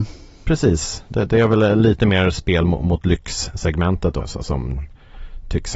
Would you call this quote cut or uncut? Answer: cut